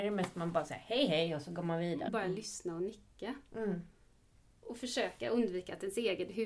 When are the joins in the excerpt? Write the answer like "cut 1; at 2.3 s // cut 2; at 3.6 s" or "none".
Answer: cut 1; at 2.1 s